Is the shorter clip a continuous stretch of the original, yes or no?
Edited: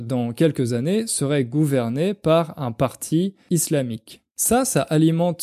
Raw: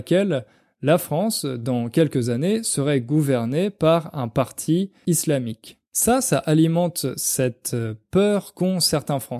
yes